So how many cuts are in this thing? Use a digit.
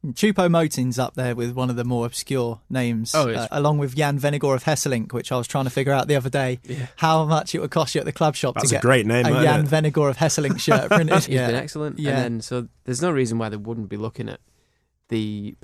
2